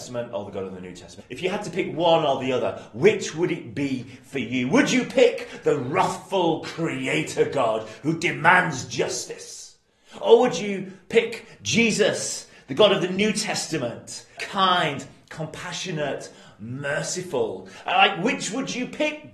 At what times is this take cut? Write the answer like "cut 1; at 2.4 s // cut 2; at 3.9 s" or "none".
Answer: cut 1; at 1.2 s // cut 2; at 14.4 s